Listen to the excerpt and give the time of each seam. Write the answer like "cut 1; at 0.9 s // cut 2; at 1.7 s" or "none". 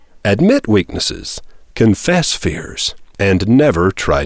none